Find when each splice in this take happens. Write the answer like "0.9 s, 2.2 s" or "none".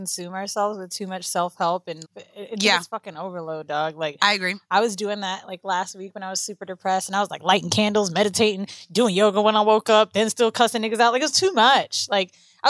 2.0 s